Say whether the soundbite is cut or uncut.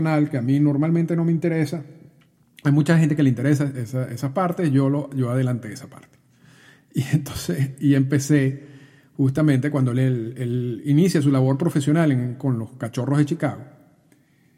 uncut